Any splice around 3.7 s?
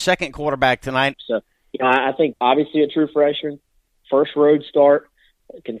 no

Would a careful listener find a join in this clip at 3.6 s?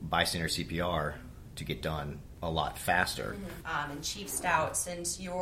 yes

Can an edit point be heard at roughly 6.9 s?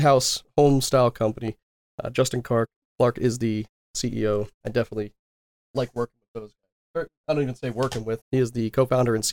no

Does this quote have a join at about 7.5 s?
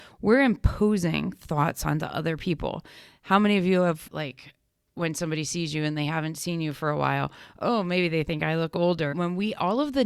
no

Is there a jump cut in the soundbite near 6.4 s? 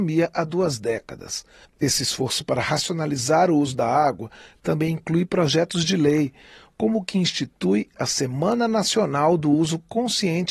no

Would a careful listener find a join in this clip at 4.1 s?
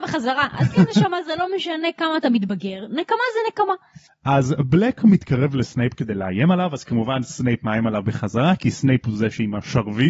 yes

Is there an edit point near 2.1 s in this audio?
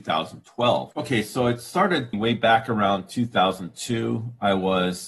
yes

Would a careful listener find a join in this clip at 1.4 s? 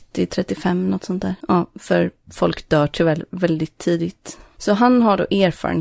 yes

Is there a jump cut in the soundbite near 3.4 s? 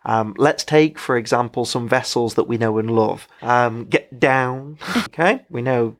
yes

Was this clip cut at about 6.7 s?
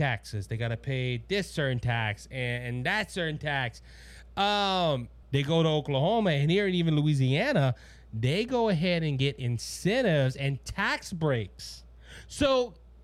no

